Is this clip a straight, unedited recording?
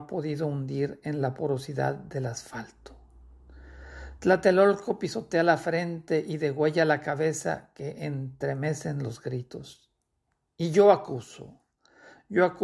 yes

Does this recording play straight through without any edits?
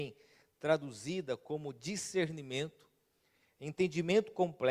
yes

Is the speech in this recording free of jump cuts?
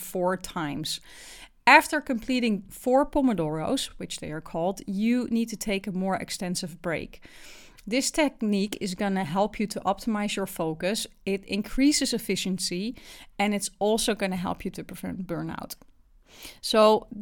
yes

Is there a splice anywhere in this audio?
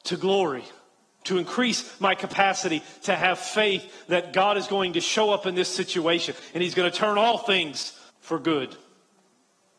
yes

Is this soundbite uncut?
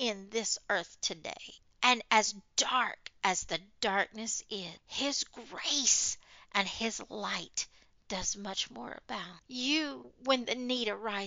no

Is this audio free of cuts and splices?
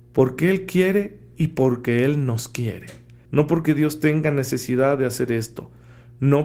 no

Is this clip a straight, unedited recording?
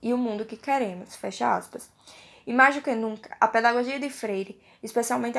yes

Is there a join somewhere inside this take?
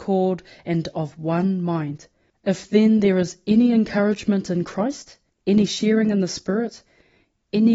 yes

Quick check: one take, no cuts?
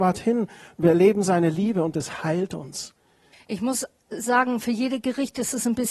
no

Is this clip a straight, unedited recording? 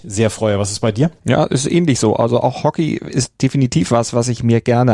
no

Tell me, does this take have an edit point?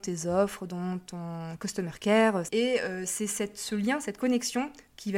yes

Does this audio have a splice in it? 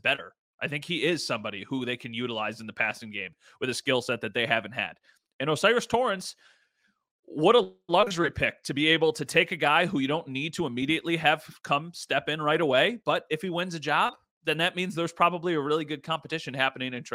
no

